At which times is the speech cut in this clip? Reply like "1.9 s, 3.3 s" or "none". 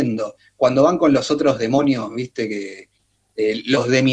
none